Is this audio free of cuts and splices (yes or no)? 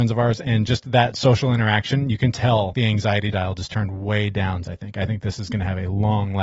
no